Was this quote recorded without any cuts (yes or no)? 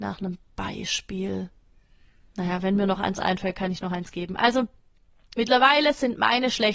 no